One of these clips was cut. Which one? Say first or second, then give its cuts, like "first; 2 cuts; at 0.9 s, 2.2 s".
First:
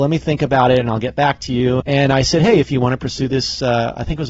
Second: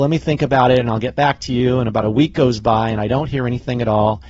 first; 1 cut; at 1.8 s